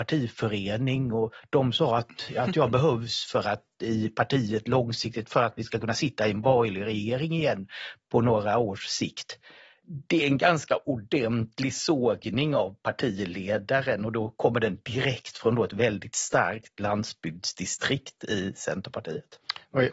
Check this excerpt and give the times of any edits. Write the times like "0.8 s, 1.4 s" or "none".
none